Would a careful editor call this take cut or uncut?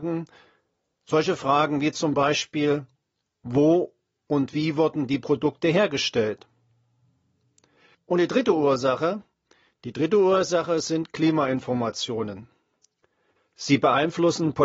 cut